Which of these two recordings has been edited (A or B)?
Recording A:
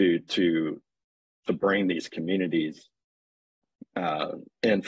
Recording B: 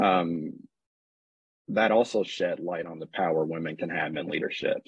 B